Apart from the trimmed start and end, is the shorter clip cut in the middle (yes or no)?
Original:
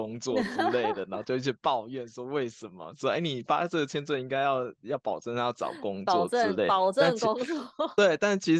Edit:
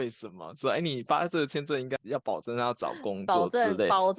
yes